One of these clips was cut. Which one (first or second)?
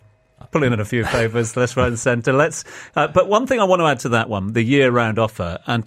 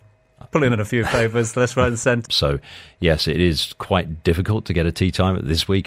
second